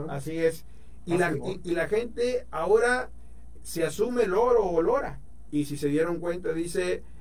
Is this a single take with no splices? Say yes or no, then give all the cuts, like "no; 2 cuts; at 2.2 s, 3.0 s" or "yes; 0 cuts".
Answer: no; 2 cuts; at 3.6 s, 5.5 s